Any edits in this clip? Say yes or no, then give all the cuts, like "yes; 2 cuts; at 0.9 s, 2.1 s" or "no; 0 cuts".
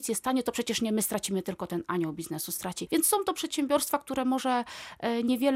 yes; 1 cut; at 2.9 s